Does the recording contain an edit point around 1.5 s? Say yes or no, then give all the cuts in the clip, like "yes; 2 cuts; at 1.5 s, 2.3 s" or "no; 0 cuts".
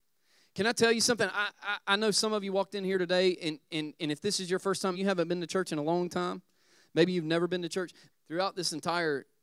no; 2 cuts; at 4.9 s, 8.1 s